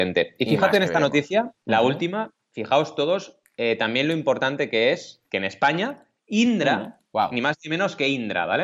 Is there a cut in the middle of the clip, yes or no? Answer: yes